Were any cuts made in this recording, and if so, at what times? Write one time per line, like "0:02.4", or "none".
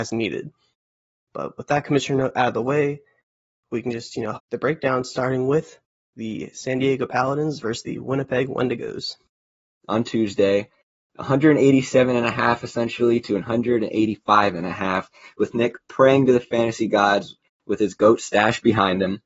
0:04.3
0:09.8